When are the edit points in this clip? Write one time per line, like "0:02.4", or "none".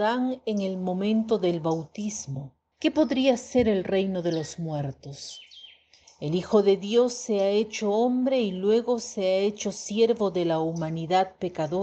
0:02.7
0:06.0